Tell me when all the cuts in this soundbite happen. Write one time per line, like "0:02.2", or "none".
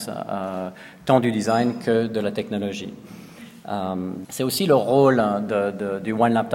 0:04.2